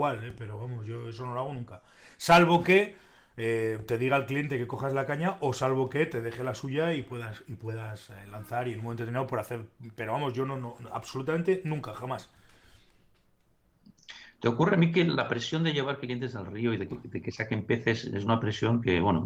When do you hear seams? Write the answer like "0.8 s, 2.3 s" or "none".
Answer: none